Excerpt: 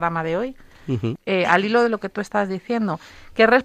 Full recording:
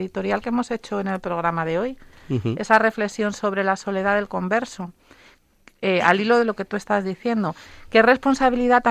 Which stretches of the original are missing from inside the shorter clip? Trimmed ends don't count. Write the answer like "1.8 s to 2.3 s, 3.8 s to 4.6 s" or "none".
2.6 s to 5.7 s